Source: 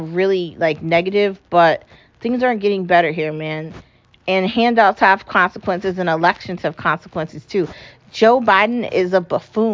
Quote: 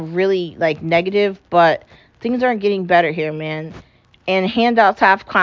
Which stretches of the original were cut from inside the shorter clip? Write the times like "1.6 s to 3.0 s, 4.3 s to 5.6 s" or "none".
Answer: none